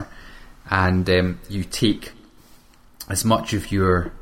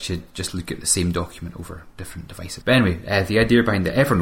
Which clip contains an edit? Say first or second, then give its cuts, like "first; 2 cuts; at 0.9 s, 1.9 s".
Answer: second; 1 cut; at 2.6 s